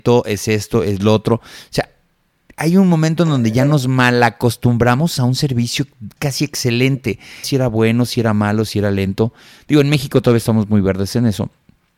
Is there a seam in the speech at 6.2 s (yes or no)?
yes